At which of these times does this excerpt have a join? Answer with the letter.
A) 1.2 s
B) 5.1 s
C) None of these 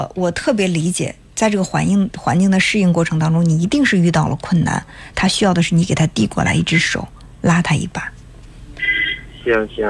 B